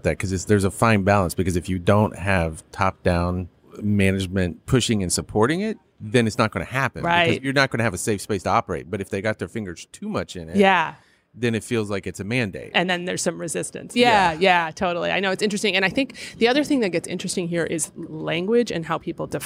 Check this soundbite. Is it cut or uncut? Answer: uncut